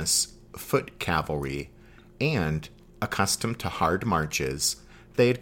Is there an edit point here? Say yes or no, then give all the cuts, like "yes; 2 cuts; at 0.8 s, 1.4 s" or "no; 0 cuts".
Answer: no; 0 cuts